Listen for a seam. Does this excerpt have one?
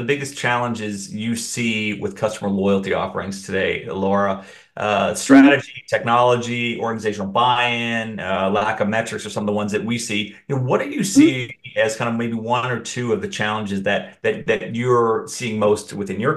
no; 0 cuts

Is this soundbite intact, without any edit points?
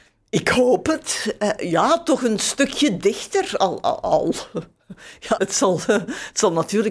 no; 1 cut; at 5.4 s

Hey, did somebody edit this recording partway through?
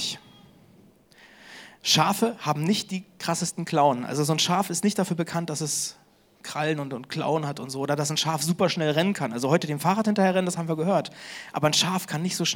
no; 0 cuts

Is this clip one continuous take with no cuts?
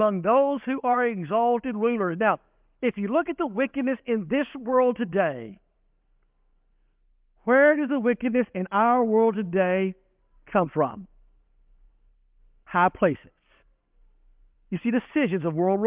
no; 1 cut; at 14.5 s

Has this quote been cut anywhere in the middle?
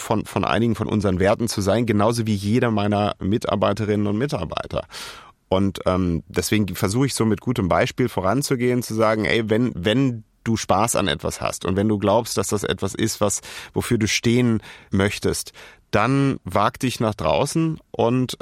yes; 1 cut; at 14.9 s

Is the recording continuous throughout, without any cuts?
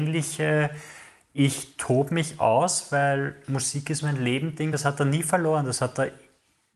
yes; 0 cuts

